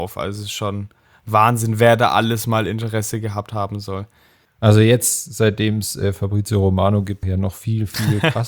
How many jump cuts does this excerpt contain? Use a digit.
2